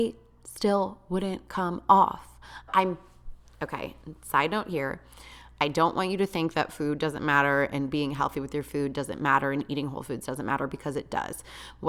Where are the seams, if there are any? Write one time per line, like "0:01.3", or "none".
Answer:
0:02.7